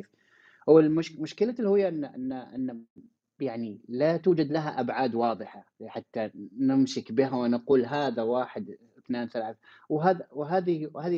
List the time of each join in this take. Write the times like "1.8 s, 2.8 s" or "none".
none

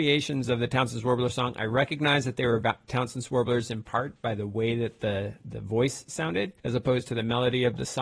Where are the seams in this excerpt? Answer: 6.6 s

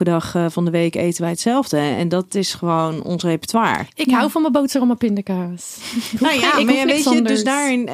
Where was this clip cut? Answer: none

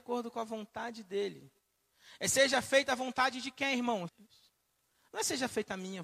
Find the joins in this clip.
4.1 s

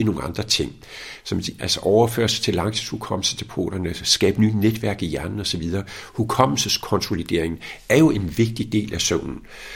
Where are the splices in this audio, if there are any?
1.6 s

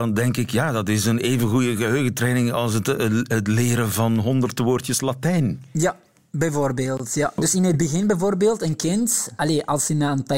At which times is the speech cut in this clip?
none

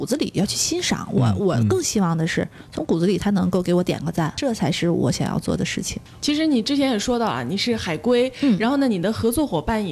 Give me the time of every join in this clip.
none

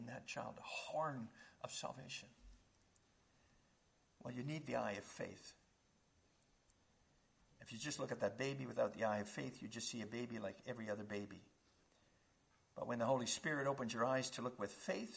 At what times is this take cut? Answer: none

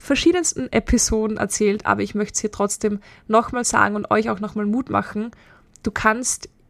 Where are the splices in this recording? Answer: none

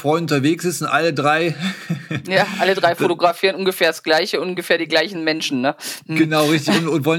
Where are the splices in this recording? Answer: none

